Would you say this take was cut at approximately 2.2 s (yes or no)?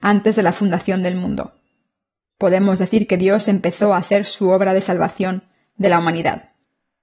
yes